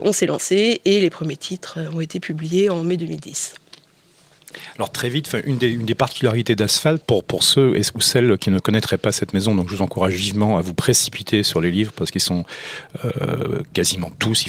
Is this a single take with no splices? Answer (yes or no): no